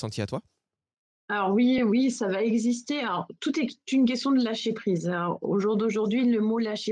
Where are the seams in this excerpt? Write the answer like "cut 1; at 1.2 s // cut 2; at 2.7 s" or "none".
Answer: none